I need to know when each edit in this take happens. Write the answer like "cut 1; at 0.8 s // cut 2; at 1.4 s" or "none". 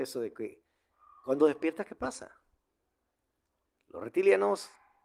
cut 1; at 3.7 s